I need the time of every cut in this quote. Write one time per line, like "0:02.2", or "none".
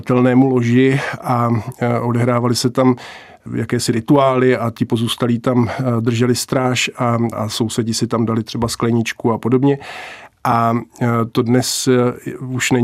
0:07.3